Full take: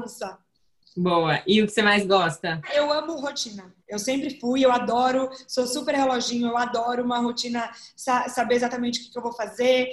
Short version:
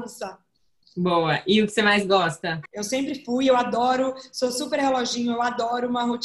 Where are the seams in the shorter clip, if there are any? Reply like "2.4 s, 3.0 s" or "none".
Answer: 2.7 s